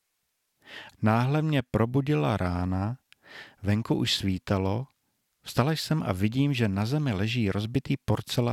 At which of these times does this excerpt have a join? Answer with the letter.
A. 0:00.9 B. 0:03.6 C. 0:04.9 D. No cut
A